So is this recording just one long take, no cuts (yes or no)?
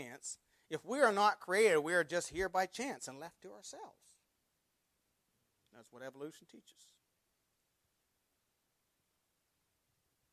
yes